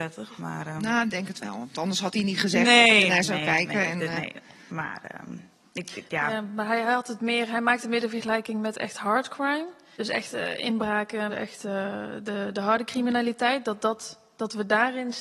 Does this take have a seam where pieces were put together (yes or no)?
yes